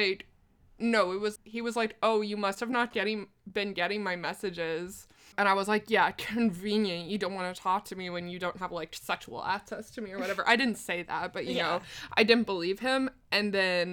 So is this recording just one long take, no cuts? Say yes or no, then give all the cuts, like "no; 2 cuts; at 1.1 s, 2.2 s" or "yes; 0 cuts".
no; 1 cut; at 1.4 s